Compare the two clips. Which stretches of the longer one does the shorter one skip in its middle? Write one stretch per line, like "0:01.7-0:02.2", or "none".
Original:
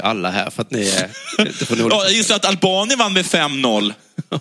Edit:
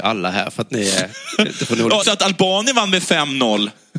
0:02.0-0:02.2